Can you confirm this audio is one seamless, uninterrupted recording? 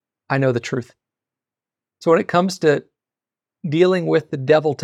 no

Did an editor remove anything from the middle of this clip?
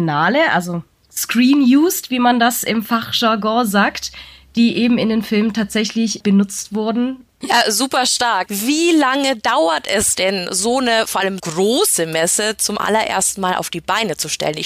yes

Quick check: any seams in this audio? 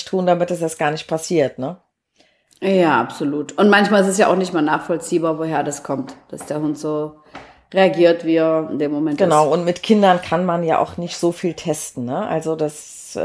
no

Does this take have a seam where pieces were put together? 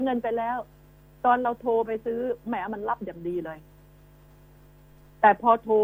no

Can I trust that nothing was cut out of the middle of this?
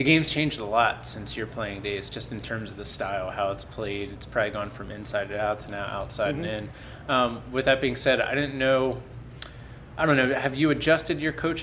yes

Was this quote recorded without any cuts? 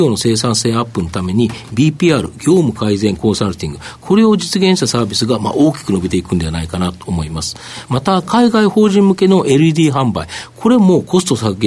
no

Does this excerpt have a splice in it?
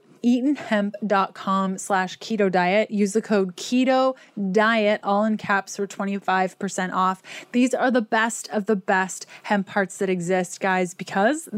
no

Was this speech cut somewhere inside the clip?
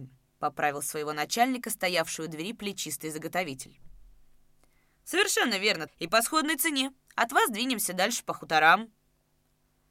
yes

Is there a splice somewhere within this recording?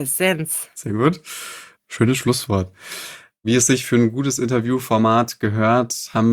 yes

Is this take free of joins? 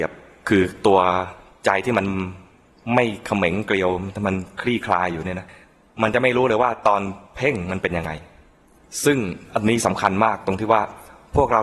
yes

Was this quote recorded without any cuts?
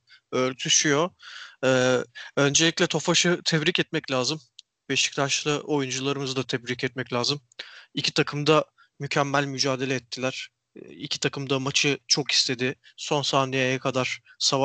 yes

